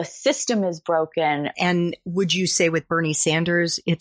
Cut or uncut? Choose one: cut